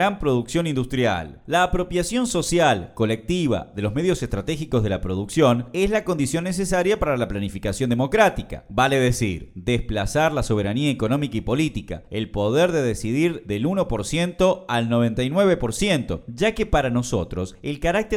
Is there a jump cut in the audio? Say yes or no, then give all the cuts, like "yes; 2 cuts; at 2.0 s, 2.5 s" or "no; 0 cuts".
no; 0 cuts